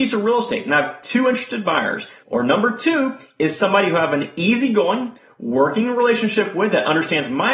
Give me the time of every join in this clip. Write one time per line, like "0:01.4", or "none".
0:02.2